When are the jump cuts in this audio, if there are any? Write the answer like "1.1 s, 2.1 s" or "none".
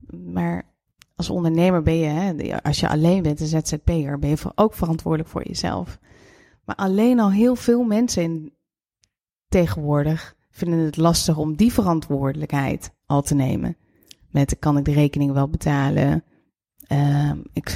none